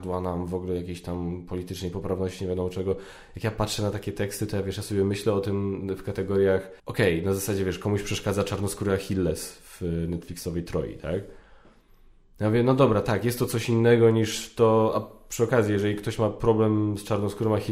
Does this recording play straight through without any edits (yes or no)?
no